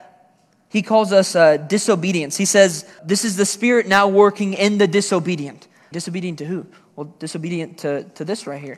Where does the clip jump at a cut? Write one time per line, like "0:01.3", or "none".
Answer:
0:03.0
0:05.9